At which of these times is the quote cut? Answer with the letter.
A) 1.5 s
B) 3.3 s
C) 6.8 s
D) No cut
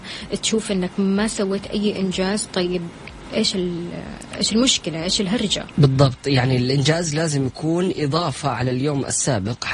D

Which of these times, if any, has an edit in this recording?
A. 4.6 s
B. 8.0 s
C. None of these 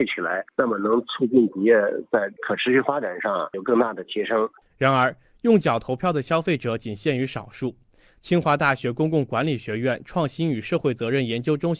A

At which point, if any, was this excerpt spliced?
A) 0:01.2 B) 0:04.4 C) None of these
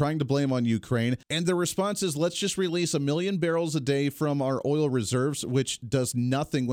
A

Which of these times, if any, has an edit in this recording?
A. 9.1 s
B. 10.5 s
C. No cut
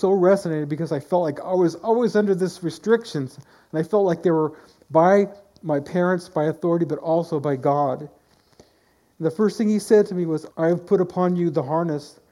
B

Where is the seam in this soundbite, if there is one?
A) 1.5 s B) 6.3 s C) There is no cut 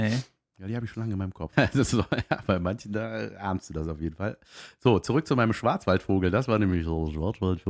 A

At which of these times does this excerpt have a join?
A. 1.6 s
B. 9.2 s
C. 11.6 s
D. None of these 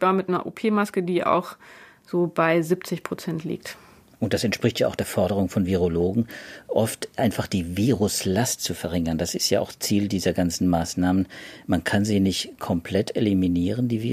D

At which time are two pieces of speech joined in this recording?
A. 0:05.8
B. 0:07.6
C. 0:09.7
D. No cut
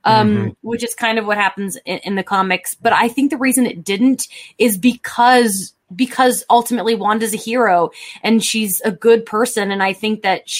A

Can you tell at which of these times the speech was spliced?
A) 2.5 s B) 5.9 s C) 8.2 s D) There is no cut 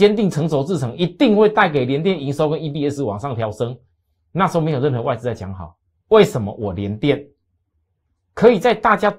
B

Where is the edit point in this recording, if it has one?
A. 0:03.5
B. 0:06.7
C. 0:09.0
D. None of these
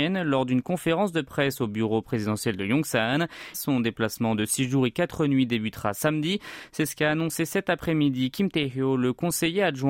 A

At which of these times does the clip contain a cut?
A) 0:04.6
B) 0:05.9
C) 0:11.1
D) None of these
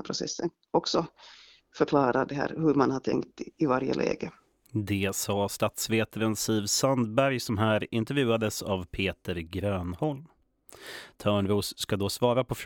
C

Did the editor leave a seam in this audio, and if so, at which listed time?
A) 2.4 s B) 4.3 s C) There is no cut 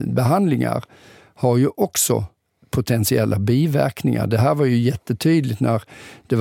C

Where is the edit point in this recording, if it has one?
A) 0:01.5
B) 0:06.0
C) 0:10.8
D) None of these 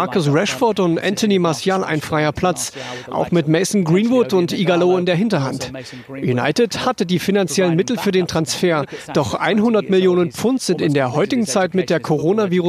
D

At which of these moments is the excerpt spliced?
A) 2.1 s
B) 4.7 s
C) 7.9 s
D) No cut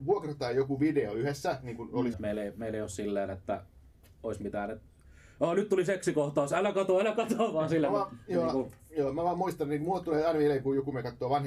A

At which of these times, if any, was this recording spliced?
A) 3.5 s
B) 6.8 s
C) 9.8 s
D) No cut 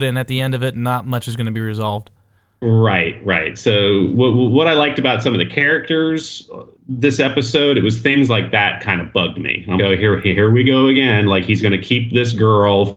C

